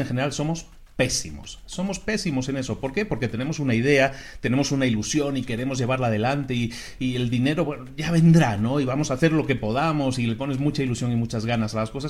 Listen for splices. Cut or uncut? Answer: uncut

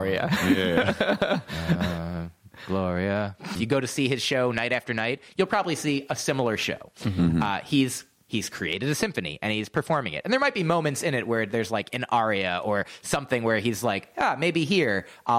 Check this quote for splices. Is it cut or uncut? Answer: cut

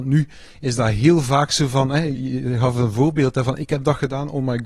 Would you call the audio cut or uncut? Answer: cut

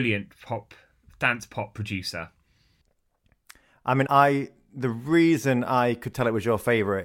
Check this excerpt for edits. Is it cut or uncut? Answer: cut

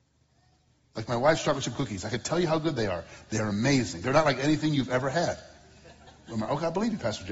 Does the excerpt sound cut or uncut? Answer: uncut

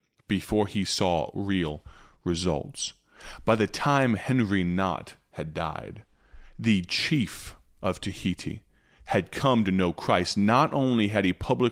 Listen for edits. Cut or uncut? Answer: uncut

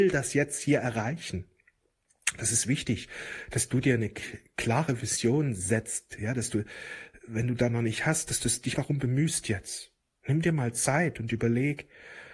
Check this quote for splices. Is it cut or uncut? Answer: cut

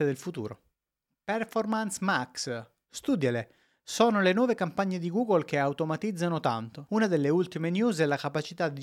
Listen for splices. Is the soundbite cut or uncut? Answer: cut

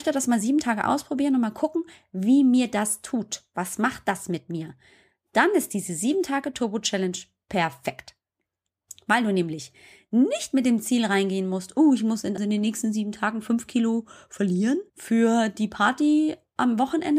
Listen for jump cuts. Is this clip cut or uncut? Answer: cut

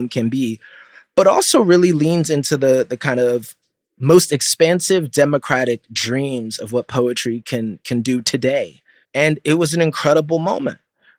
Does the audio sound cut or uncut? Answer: cut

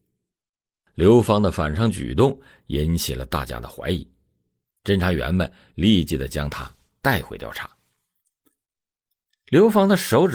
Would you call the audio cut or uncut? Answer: uncut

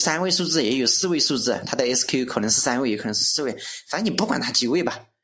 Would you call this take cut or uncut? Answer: uncut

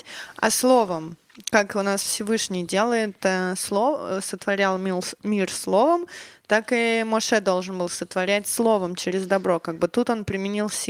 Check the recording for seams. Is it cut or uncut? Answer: uncut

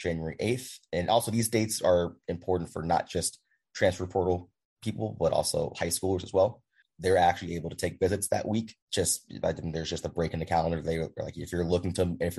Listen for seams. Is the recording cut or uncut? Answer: cut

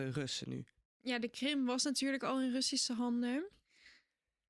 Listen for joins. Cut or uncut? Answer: cut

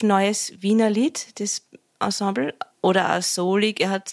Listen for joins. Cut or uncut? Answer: cut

